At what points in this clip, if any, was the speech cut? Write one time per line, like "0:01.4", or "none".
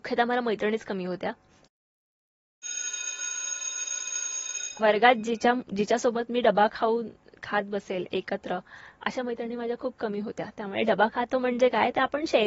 0:04.8